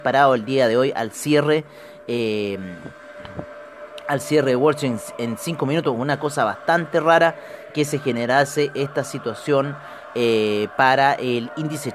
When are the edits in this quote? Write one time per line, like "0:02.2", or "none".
none